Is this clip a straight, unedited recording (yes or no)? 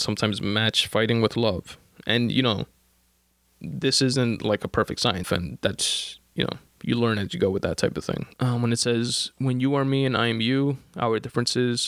no